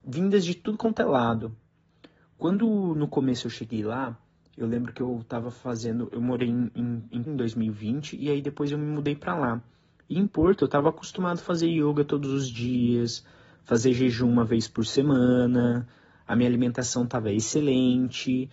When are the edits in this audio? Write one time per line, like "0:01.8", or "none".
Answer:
0:07.3